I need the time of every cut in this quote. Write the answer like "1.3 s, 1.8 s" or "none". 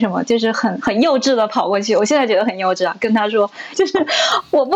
3.7 s

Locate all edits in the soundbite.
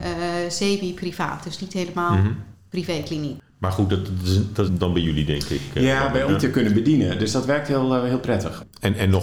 4.7 s, 6.3 s

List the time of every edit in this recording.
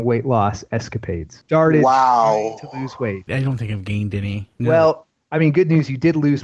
1.4 s, 3.3 s, 4.6 s

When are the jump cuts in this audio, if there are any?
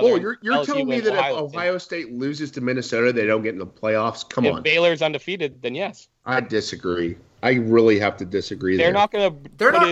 none

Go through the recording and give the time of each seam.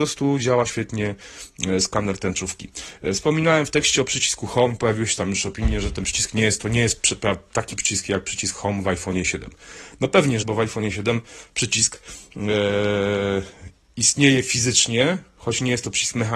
10.4 s

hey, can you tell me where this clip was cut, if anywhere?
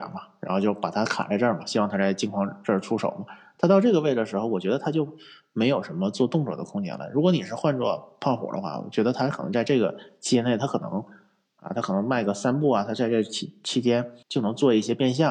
14.2 s

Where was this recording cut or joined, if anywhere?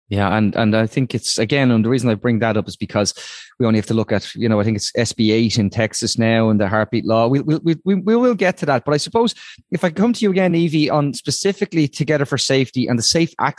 none

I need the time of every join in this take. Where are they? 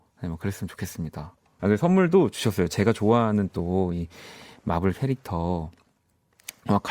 1.6 s

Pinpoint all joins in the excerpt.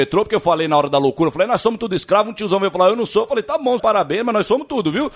3.8 s

